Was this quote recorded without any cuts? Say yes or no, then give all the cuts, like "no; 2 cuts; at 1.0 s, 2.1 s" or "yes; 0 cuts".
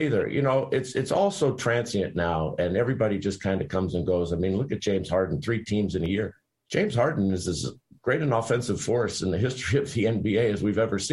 yes; 0 cuts